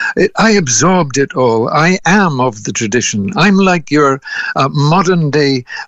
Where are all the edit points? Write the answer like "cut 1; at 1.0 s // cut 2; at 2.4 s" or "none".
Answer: none